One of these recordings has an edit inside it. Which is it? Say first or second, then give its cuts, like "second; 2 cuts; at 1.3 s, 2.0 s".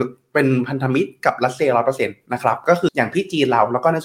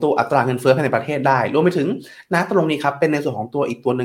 first; 1 cut; at 2.9 s